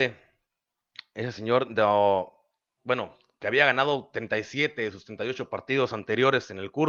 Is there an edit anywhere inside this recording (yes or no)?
yes